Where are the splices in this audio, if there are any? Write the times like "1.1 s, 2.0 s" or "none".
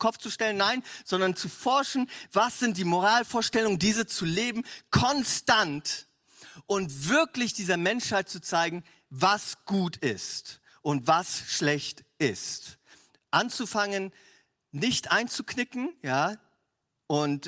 none